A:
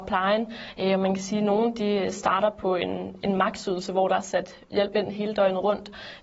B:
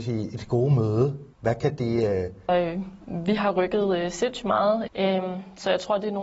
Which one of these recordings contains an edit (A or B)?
B